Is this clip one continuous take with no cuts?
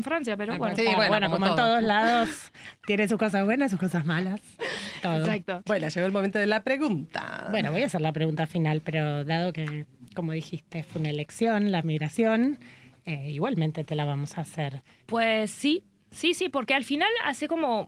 no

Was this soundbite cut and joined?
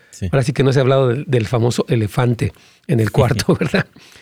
no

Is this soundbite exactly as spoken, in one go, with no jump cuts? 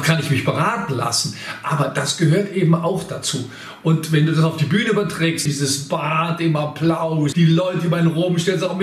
no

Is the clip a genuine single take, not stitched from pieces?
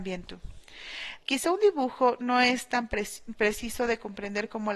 no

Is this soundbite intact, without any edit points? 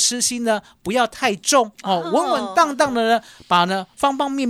yes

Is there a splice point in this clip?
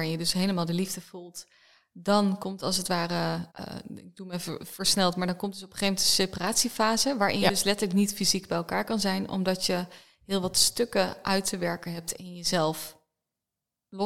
yes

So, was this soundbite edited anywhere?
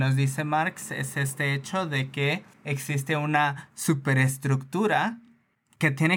no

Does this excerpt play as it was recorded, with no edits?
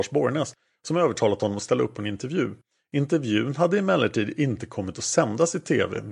yes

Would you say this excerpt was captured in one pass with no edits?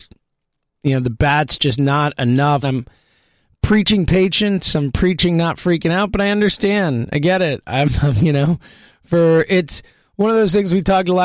no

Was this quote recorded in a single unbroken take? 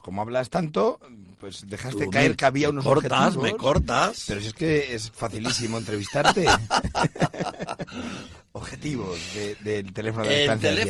yes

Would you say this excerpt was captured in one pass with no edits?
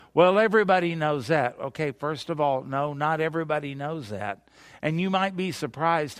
yes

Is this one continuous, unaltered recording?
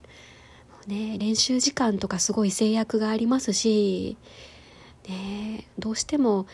yes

